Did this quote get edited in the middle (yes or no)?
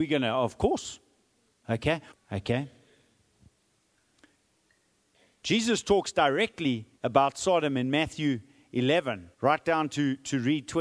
yes